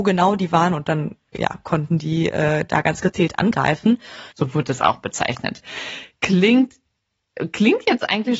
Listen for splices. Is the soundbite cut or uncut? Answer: cut